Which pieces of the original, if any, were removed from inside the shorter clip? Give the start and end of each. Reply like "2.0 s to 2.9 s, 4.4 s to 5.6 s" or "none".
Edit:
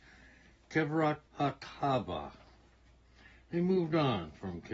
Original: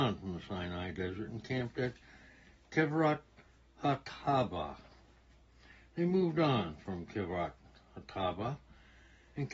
3.3 s to 3.7 s